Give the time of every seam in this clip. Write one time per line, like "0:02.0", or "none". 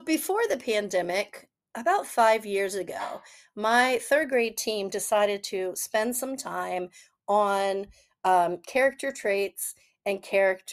none